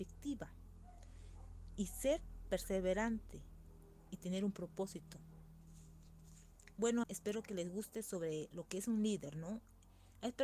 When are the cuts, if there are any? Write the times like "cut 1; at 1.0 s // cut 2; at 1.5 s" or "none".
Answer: cut 1; at 7.0 s